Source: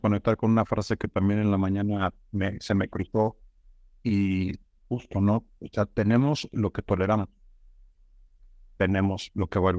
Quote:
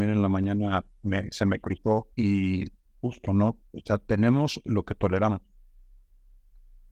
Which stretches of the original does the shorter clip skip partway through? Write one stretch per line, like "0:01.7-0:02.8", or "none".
0:03.4-0:04.0